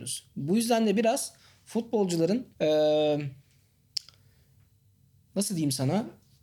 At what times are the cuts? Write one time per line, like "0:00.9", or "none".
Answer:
0:02.5